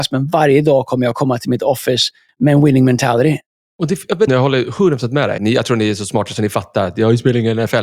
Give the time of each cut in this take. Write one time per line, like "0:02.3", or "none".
0:04.3
0:05.4